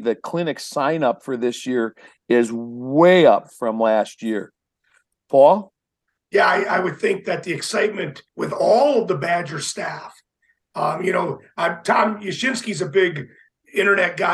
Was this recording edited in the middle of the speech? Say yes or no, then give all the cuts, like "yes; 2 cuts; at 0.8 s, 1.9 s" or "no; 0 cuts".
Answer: yes; 1 cut; at 8.3 s